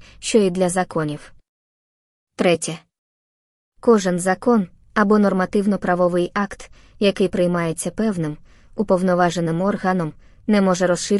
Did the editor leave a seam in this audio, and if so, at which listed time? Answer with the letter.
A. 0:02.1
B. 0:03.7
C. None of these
C